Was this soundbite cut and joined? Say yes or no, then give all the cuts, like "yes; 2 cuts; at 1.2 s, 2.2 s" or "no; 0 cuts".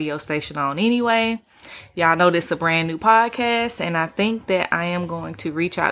no; 0 cuts